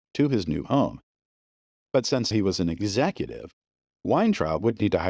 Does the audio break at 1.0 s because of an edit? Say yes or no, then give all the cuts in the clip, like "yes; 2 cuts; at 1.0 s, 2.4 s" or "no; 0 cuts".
no; 1 cut; at 2.3 s